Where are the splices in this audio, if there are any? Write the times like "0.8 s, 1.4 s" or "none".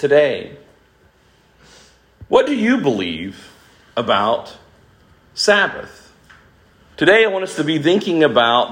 6.9 s